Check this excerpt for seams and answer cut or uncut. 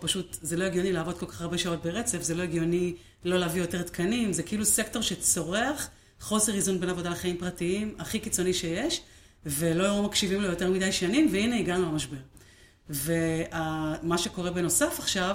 uncut